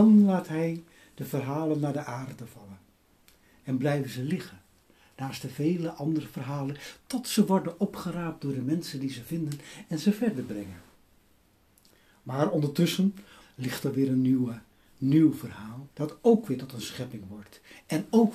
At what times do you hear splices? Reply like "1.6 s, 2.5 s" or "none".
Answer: 13.4 s, 15.9 s